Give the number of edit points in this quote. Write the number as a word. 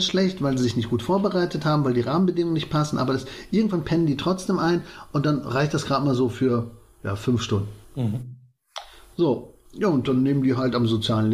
two